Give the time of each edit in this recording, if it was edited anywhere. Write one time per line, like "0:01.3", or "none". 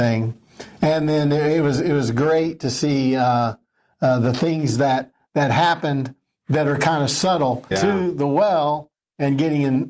0:07.7